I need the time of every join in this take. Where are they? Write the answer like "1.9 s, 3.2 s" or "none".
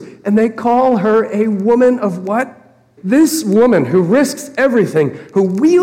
3.0 s